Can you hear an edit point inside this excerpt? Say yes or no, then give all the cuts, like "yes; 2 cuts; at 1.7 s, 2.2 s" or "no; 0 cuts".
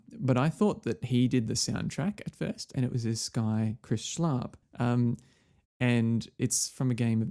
yes; 2 cuts; at 2.7 s, 4.6 s